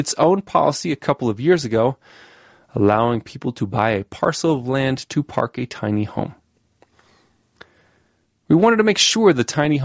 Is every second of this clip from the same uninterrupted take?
yes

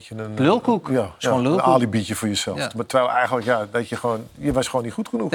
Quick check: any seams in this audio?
no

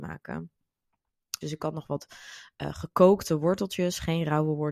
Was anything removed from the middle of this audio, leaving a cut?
yes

